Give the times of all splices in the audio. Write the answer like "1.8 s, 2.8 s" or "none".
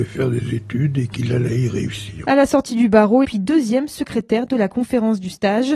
3.2 s